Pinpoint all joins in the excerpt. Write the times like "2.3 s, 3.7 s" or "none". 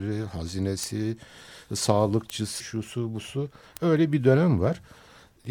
2.6 s